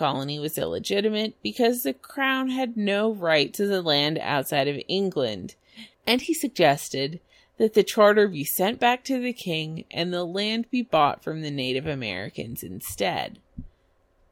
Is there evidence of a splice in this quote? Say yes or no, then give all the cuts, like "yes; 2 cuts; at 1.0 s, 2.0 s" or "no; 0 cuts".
yes; 1 cut; at 5.9 s